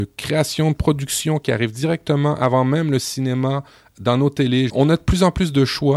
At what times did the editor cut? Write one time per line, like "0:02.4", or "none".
0:04.7